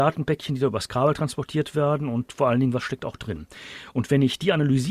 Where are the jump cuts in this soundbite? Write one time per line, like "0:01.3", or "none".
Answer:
none